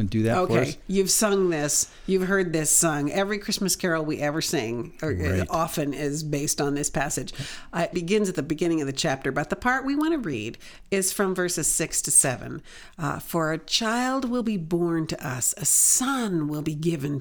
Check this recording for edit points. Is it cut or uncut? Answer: cut